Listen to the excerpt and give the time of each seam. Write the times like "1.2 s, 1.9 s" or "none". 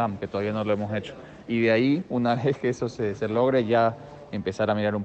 none